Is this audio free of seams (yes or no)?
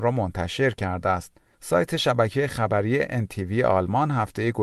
no